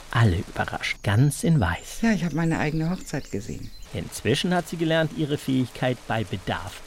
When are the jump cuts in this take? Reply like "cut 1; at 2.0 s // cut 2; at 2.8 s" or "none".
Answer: cut 1; at 1.0 s // cut 2; at 3.8 s